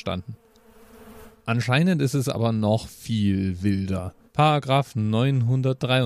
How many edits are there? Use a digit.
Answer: 2